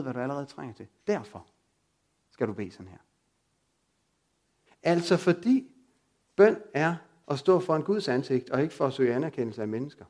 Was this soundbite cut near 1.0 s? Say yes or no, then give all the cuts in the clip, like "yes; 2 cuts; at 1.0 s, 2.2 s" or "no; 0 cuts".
no; 1 cut; at 4.7 s